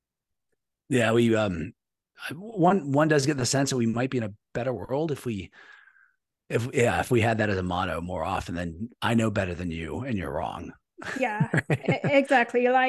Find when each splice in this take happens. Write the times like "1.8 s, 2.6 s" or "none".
none